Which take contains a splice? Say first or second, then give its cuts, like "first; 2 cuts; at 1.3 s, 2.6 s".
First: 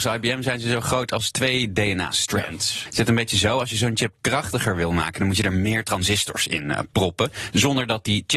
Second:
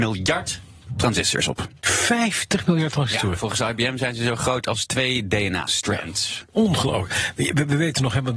first; 1 cut; at 2.9 s